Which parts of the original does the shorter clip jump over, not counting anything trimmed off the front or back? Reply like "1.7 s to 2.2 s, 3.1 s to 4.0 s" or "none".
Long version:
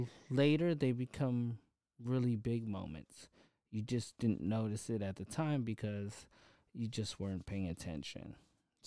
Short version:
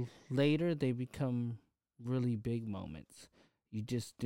none